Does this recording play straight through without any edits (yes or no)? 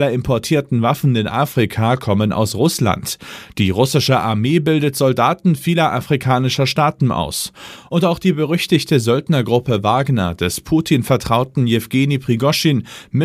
yes